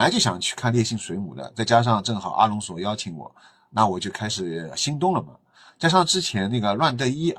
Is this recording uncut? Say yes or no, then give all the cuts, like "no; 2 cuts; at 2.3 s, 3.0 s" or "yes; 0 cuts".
yes; 0 cuts